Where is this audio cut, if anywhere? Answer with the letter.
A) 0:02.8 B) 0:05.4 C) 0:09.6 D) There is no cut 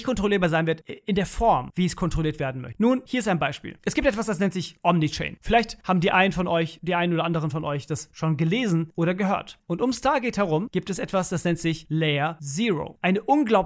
C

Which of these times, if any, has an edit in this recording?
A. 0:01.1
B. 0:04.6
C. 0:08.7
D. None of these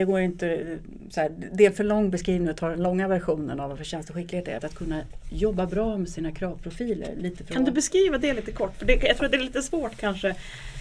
B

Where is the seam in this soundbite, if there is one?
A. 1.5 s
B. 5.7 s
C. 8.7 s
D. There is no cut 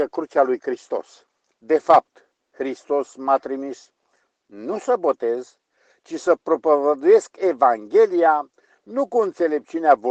A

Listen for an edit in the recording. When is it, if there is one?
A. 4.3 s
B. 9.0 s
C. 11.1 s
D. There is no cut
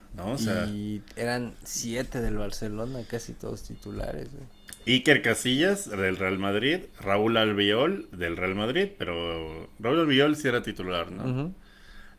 D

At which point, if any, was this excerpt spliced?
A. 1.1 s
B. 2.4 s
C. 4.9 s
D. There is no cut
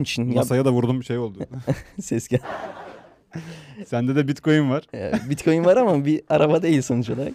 B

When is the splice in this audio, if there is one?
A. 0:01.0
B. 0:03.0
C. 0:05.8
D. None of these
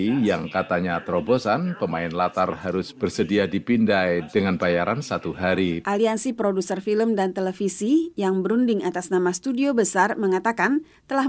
C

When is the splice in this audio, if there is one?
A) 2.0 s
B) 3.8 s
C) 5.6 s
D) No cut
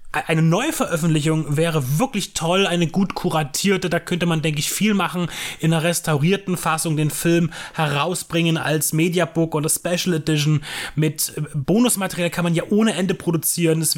D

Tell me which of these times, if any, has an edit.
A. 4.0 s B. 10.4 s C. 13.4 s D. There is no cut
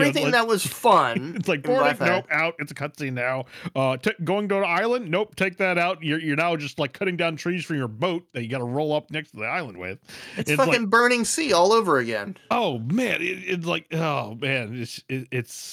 D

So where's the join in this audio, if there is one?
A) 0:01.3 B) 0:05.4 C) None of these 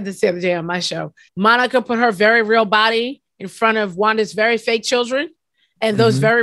A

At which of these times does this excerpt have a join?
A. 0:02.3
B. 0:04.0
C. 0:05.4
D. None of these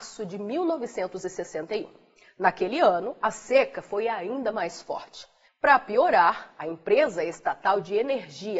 C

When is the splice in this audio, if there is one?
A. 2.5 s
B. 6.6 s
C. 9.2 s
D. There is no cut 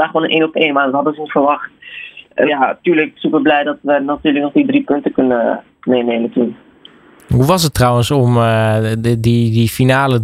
A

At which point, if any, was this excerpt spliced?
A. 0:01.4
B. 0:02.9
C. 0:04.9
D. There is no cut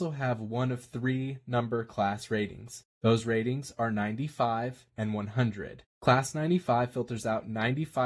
C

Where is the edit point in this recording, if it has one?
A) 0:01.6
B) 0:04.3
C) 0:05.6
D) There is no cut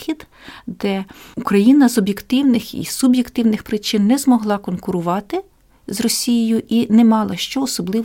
D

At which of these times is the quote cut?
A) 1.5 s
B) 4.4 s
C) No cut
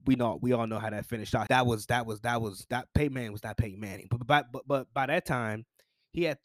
A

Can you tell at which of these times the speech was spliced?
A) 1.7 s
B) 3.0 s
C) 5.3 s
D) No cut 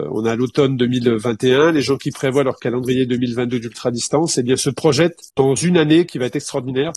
C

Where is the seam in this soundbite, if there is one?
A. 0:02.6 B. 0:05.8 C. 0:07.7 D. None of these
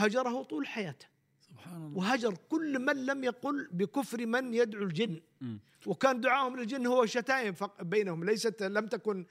D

